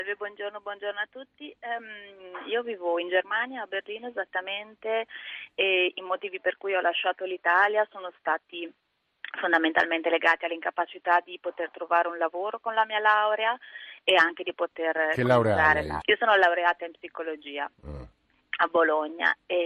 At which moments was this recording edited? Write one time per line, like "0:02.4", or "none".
0:16.0